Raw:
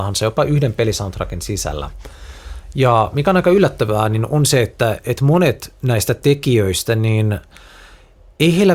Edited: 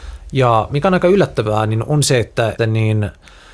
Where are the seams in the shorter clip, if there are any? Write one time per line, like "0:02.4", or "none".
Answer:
0:02.6